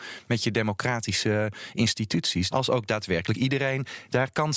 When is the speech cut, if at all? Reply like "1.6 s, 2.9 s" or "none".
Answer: 2.5 s